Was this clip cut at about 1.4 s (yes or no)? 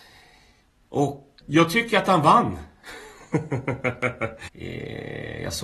yes